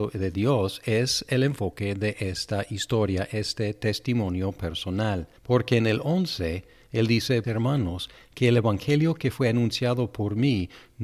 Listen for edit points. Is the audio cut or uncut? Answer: cut